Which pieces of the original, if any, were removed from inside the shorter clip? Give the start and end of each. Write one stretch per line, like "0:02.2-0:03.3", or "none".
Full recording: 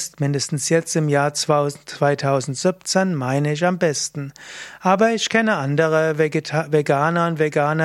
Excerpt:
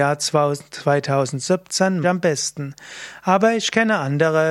0:03.2-0:03.6